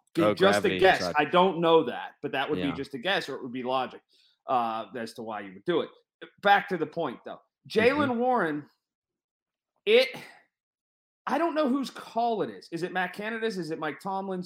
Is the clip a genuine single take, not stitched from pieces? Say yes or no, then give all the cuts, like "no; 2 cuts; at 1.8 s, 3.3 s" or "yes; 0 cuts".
yes; 0 cuts